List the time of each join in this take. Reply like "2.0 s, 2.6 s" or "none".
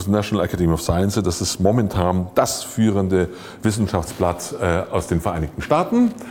none